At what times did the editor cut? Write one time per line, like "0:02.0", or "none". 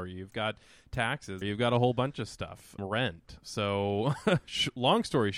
0:01.4
0:02.8